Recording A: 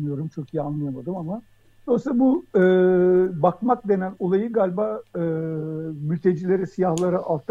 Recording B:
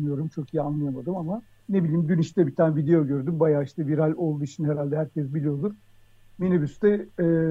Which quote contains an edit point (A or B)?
B